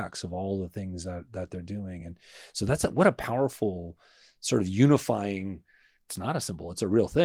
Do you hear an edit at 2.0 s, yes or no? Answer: no